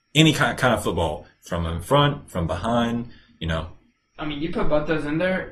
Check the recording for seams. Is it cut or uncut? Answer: cut